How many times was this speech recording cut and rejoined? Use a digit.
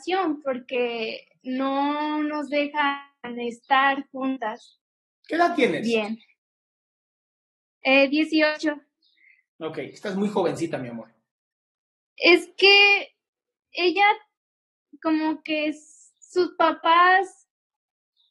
1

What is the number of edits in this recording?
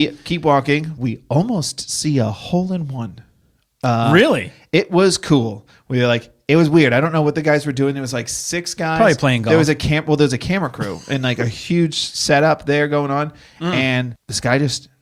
0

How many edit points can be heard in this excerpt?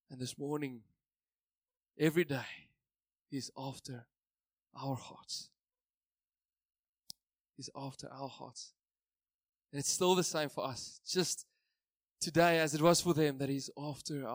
0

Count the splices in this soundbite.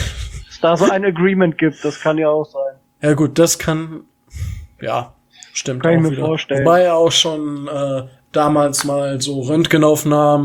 0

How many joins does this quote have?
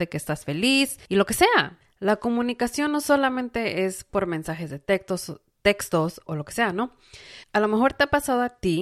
2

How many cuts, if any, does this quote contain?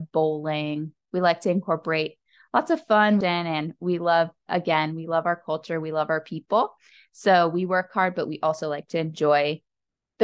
1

